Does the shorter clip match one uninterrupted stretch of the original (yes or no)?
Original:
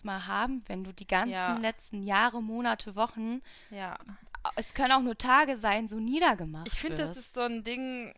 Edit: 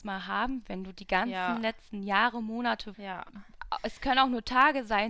no